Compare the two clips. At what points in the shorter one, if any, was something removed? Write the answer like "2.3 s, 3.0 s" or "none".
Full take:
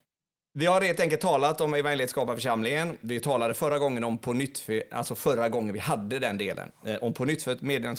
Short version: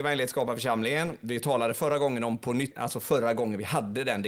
2.7 s